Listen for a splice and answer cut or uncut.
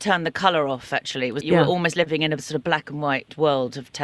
cut